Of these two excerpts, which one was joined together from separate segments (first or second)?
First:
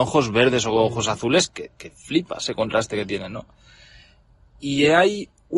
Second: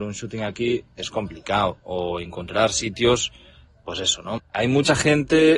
second